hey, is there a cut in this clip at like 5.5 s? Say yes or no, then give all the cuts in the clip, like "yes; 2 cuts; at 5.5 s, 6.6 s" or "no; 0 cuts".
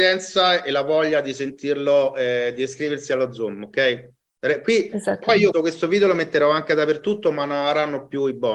yes; 1 cut; at 5.5 s